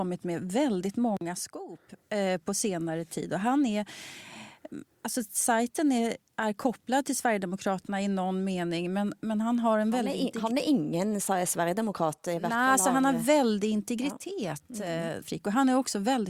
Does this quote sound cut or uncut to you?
cut